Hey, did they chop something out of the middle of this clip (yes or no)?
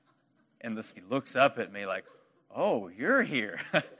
yes